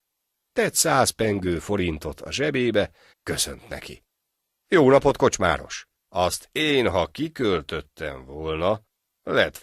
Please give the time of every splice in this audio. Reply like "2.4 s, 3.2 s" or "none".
3.1 s, 6.1 s